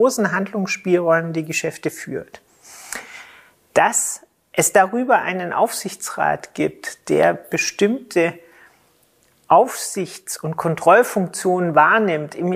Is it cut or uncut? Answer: uncut